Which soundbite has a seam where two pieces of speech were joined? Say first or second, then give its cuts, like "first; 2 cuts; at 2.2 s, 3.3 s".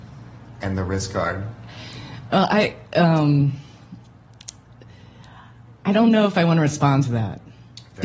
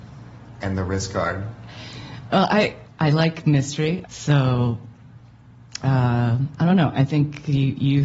second; 2 cuts; at 2.9 s, 4.0 s